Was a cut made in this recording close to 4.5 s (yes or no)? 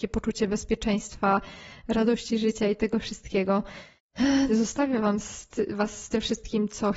yes